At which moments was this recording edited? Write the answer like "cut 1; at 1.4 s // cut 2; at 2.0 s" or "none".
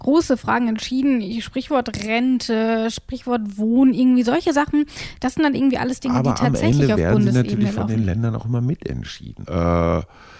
cut 1; at 9.5 s